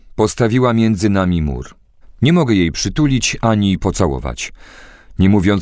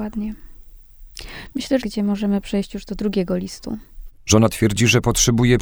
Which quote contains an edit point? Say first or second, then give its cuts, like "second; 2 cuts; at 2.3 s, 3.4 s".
second; 2 cuts; at 1.8 s, 4.2 s